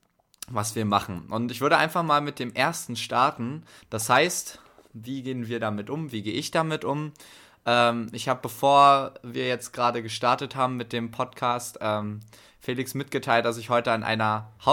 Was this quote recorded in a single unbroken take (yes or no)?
no